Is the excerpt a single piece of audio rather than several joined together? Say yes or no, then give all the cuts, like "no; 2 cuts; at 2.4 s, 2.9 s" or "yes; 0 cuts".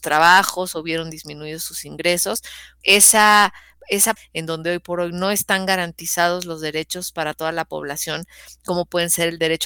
no; 2 cuts; at 2.8 s, 4.2 s